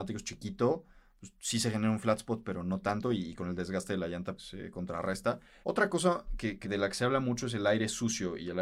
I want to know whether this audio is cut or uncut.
cut